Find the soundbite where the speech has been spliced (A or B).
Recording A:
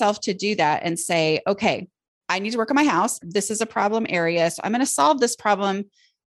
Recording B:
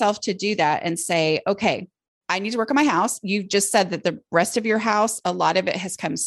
A